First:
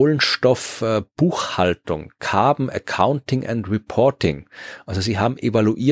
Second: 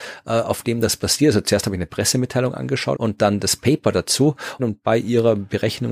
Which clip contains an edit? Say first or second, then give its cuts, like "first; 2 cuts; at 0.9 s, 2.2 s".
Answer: second; 2 cuts; at 3.0 s, 4.6 s